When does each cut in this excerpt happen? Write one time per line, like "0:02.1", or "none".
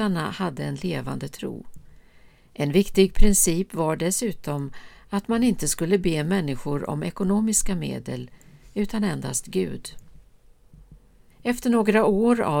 0:11.3